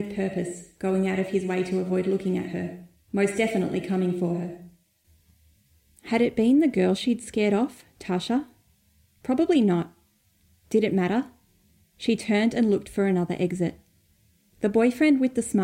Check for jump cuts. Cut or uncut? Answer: uncut